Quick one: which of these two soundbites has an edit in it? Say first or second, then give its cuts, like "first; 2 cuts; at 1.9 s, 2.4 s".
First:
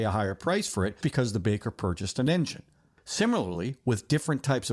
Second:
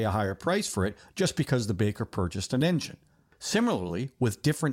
first; 1 cut; at 1.0 s